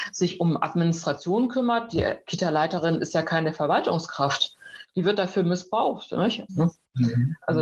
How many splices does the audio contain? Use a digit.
1